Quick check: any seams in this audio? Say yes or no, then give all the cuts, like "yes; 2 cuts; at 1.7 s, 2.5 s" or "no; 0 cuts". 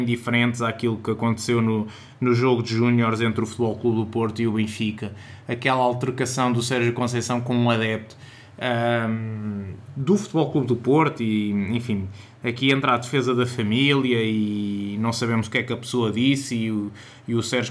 no; 0 cuts